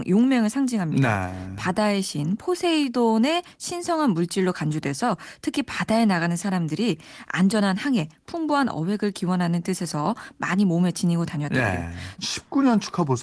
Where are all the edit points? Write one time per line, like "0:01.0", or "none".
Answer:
0:12.2